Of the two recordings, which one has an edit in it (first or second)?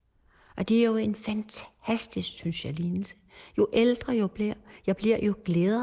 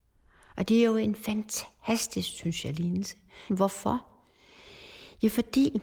second